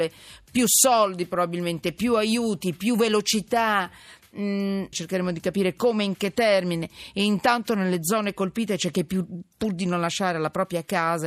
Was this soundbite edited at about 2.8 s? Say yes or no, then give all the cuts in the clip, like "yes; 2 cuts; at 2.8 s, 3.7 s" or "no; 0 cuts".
no; 1 cut; at 4.9 s